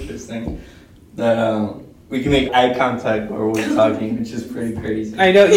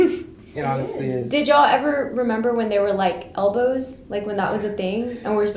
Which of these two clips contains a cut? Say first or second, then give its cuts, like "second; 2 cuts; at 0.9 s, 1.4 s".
first; 1 cut; at 2.5 s